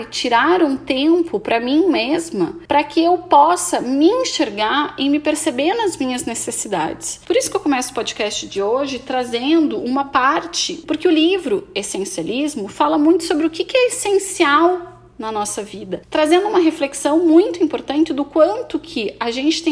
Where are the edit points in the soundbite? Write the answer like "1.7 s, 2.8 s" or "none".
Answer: 10.8 s